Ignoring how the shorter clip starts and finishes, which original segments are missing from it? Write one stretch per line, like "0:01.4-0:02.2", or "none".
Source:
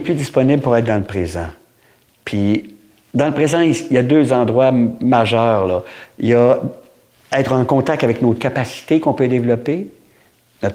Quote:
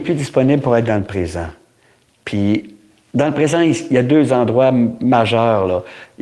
none